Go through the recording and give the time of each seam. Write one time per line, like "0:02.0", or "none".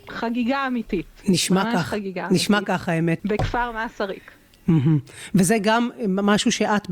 0:03.2